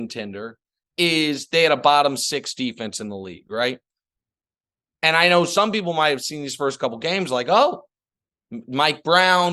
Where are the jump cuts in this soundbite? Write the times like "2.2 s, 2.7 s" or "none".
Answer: none